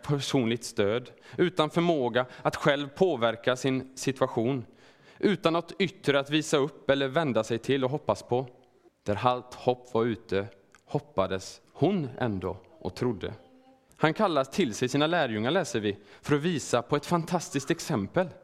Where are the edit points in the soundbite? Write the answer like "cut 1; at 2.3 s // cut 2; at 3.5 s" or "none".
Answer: cut 1; at 8.9 s // cut 2; at 13.9 s